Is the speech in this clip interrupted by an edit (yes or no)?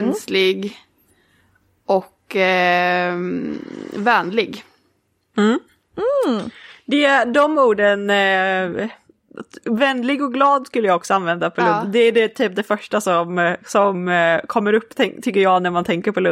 no